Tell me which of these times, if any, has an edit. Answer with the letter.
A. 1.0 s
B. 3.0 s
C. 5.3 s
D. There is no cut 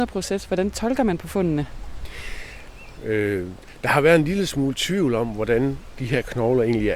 B